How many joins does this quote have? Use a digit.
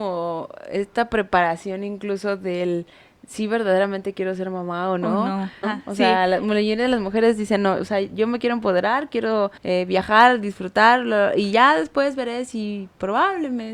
2